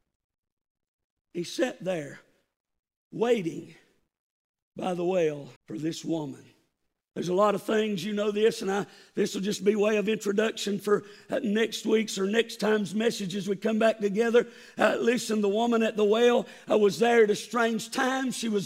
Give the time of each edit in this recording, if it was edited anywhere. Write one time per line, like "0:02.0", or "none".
0:05.6